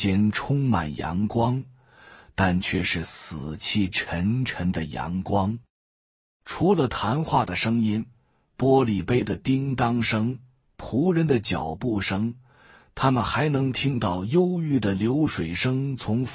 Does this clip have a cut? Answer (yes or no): no